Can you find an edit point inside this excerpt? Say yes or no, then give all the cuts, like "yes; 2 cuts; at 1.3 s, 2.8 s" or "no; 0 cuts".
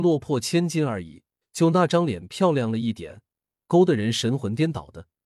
yes; 1 cut; at 1.4 s